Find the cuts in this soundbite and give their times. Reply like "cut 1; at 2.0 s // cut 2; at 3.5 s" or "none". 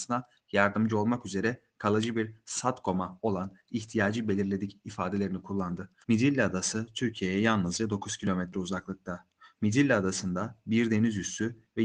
cut 1; at 6.0 s // cut 2; at 9.6 s